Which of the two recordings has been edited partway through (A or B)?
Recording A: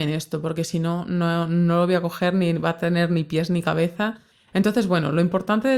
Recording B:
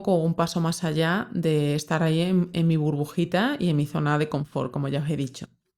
A